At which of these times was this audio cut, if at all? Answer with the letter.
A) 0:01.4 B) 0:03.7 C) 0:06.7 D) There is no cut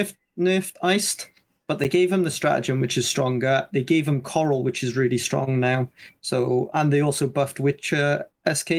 C